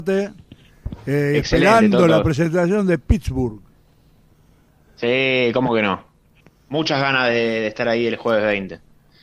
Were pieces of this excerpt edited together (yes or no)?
no